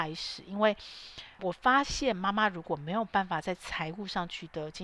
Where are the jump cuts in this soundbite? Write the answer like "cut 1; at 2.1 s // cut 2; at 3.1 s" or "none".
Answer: cut 1; at 1.4 s